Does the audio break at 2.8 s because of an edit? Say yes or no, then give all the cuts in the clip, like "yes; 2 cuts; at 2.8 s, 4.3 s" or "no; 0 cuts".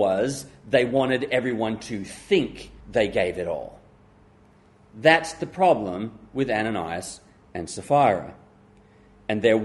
yes; 1 cut; at 2.8 s